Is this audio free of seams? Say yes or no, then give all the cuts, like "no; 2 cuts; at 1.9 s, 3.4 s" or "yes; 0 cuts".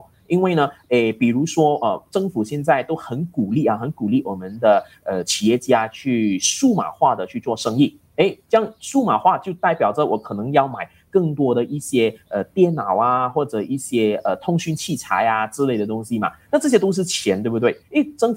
yes; 0 cuts